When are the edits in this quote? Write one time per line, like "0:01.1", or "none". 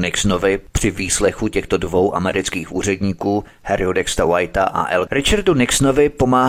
0:05.1